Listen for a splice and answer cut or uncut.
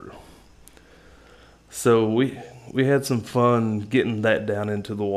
uncut